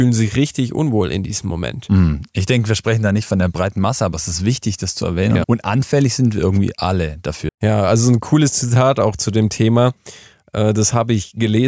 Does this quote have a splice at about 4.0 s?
no; 2 cuts; at 5.4 s, 7.5 s

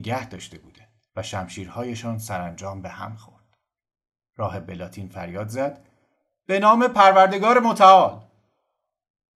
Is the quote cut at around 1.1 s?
yes; 1 cut; at 1.1 s

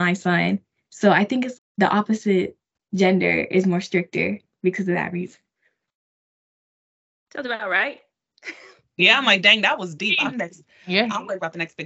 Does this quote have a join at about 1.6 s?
yes; 1 cut; at 1.6 s

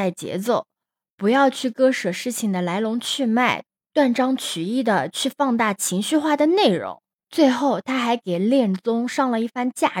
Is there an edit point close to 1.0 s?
no; 0 cuts

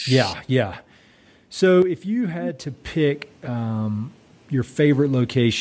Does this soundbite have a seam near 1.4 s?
no; 0 cuts

